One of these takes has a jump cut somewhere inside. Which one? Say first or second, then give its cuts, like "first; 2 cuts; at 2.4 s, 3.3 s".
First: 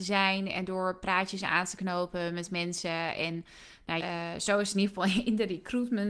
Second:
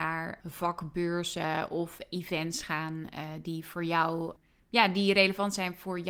first; 1 cut; at 4.0 s